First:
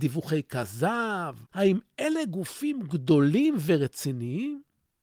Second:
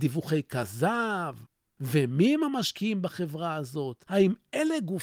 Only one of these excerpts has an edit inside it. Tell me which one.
first; 1 cut; at 1.5 s

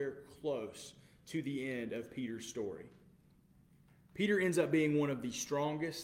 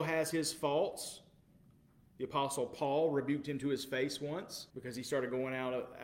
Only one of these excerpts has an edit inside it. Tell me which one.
second; 1 cut; at 4.7 s

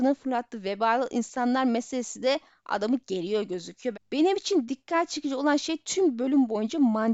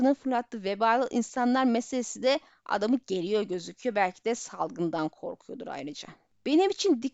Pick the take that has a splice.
first; 1 cut; at 3.9 s

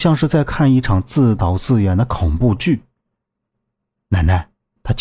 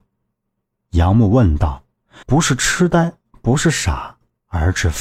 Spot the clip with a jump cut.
second; 1 cut; at 2.2 s

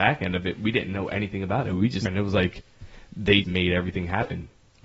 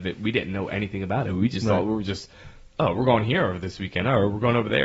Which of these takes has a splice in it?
first; 2 cuts; at 2.1 s, 3.4 s

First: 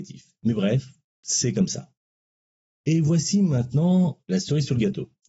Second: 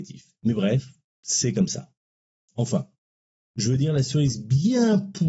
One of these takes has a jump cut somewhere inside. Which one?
second; 1 cut; at 2.5 s

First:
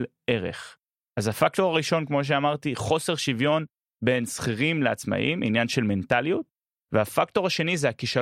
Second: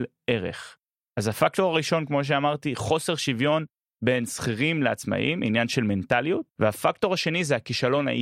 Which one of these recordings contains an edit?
second; 1 cut; at 6.5 s

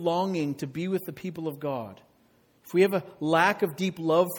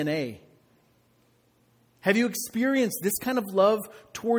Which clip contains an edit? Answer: second; 1 cut; at 2.0 s

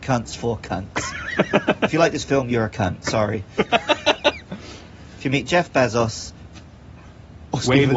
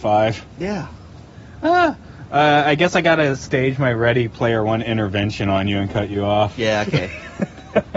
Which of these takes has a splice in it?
first; 1 cut; at 7.0 s

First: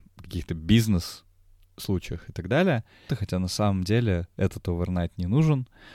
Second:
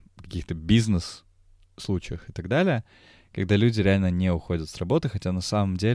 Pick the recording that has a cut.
first; 1 cut; at 3.1 s

